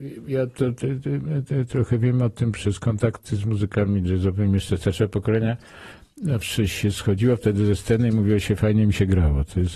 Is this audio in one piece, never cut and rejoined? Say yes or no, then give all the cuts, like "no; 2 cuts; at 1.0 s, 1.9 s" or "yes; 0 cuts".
yes; 0 cuts